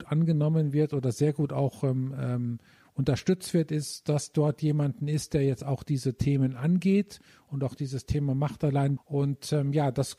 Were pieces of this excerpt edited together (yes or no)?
yes